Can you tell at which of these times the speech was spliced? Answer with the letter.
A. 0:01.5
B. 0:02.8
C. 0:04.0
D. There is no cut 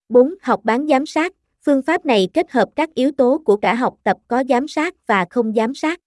D